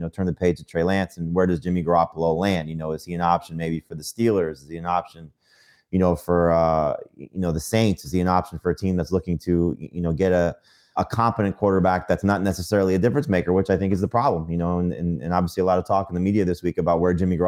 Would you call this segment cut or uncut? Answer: cut